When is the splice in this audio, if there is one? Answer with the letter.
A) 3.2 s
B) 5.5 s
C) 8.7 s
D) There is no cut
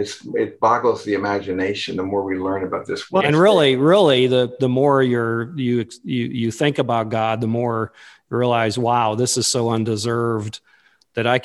A